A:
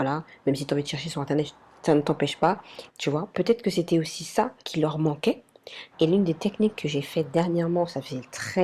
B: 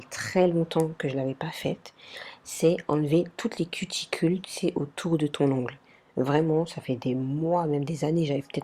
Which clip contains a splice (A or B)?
A